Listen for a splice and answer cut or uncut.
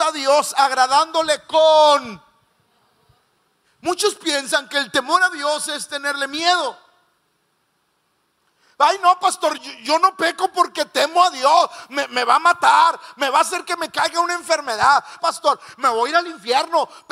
cut